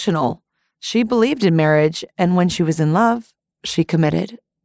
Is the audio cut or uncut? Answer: uncut